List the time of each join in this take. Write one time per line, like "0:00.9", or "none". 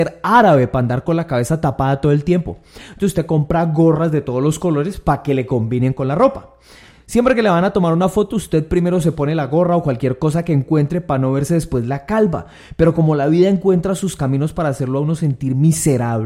none